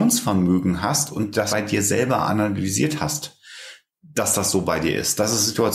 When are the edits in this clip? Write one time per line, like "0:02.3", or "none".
0:01.5